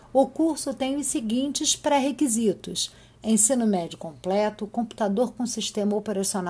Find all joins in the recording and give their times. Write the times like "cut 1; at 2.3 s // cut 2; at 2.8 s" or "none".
none